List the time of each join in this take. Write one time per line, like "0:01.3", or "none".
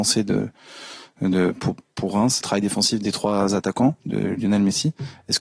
0:02.4
0:04.0